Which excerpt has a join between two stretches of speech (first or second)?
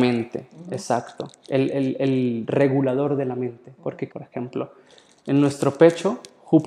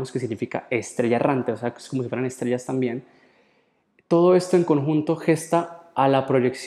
first